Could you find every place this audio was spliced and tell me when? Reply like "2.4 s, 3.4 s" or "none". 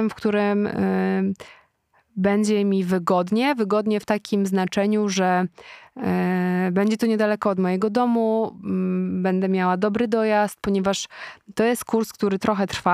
none